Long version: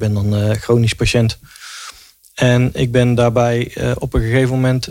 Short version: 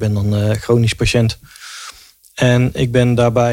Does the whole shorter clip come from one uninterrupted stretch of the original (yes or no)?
yes